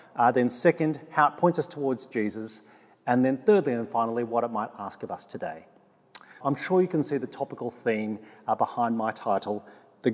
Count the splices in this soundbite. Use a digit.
1